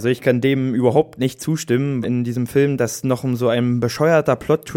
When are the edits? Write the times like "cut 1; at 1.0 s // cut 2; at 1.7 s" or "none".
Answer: cut 1; at 2.0 s